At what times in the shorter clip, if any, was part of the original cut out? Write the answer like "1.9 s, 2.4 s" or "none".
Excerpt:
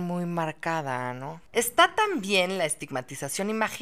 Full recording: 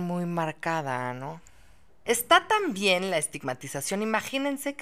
1.5 s